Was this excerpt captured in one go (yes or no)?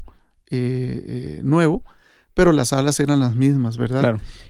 yes